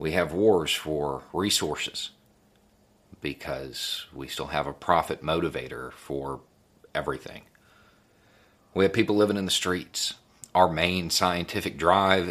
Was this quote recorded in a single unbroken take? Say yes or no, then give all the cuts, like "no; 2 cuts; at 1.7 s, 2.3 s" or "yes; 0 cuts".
yes; 0 cuts